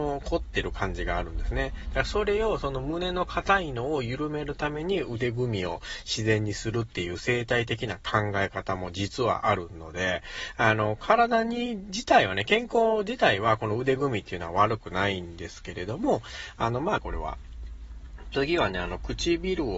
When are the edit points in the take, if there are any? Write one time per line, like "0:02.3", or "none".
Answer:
0:17.0